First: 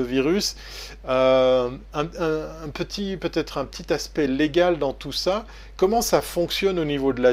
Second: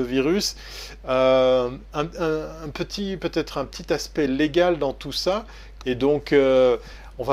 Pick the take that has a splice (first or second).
second